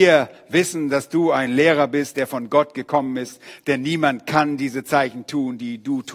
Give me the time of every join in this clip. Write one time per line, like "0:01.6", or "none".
none